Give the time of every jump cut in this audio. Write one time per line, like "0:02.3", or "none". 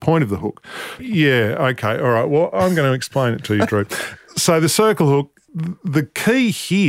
0:01.0